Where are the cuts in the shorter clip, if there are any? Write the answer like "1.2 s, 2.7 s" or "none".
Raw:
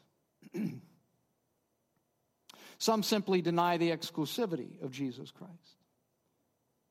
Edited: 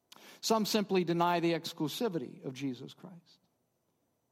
none

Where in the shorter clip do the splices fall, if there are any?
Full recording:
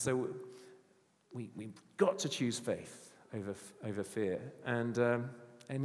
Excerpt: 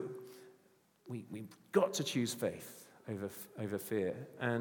none

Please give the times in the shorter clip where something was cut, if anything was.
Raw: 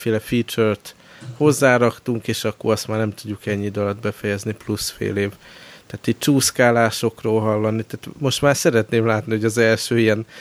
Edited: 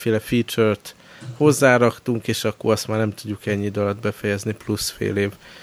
none

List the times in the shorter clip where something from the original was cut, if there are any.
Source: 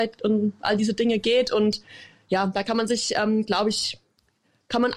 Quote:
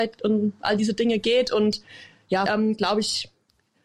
2.4 s

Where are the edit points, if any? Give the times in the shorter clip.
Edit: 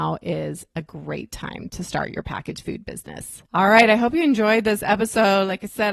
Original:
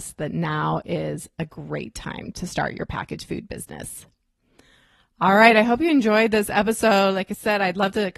3.5 s

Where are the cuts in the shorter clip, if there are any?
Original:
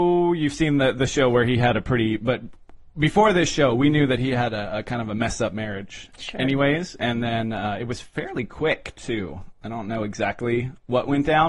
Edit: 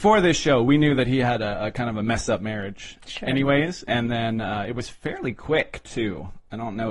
none

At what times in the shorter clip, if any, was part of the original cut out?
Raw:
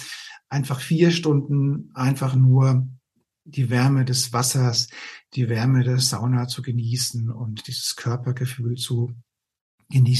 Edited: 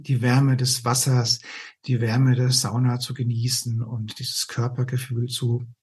none

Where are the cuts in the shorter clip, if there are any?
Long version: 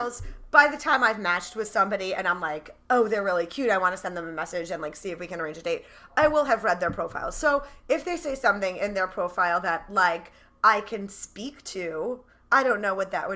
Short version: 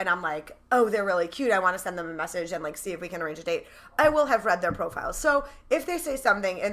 none

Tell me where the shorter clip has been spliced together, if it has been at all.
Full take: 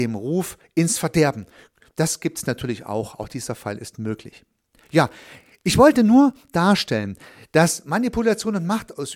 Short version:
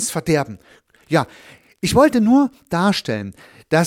0.9 s

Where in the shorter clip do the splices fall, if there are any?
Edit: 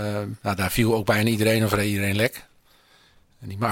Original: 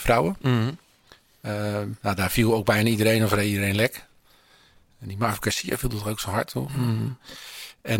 none

